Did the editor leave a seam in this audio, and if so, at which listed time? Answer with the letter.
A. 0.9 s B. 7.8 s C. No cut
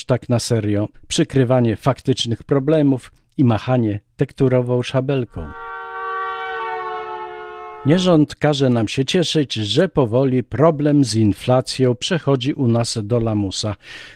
A